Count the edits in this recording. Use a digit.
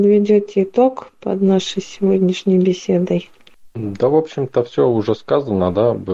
0